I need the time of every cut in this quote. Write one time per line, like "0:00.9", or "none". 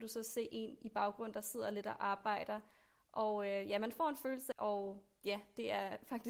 0:04.5